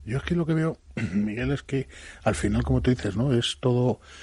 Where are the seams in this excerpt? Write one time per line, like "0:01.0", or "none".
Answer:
none